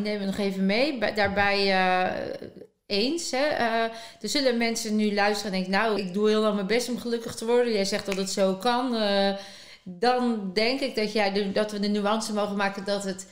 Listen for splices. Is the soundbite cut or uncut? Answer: cut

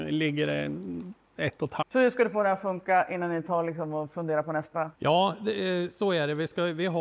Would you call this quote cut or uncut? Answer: cut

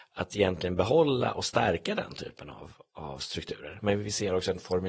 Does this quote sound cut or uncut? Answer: uncut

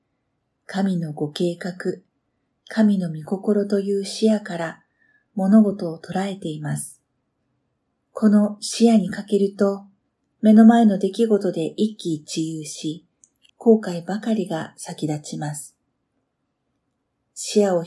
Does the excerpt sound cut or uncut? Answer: cut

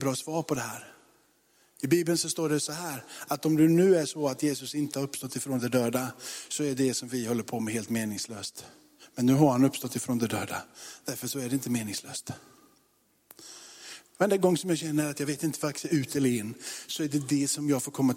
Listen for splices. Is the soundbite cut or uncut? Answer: uncut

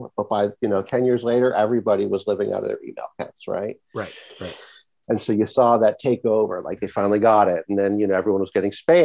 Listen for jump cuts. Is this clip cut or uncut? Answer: uncut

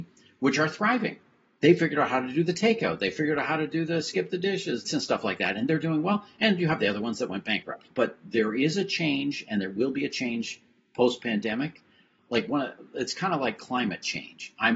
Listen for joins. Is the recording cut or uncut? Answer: cut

